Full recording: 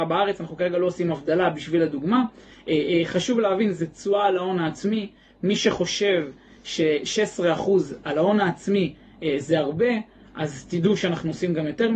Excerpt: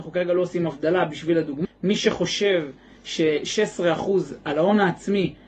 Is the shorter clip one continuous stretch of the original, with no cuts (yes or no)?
no